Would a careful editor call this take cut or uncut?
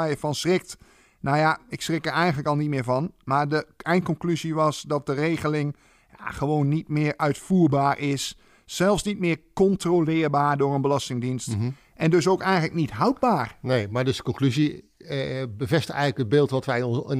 uncut